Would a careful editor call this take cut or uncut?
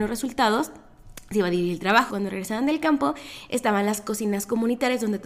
cut